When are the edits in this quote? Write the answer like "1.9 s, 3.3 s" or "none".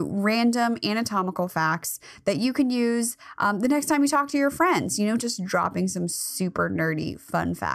5.2 s

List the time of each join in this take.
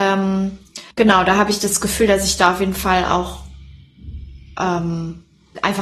0.9 s

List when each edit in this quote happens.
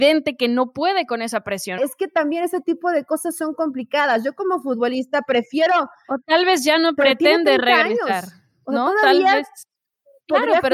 1.8 s

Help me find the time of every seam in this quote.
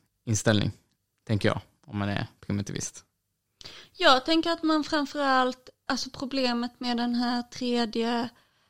5.9 s

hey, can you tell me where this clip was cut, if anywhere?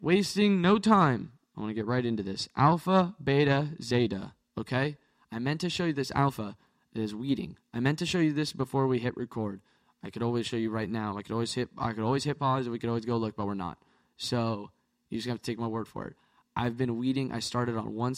none

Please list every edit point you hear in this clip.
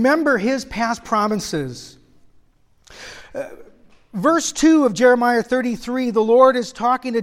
none

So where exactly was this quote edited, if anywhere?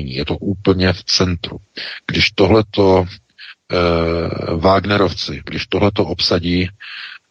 5.4 s

